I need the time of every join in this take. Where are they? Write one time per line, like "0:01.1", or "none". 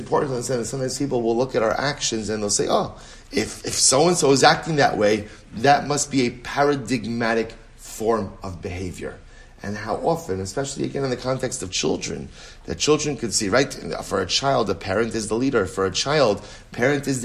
none